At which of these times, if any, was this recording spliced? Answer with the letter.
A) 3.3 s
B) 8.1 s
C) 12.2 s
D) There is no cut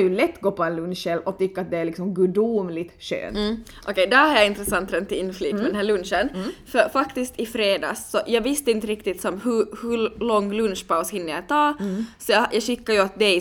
D